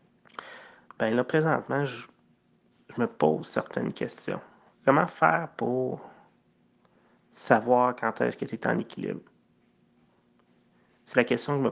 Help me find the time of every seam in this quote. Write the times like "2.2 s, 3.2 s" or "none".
none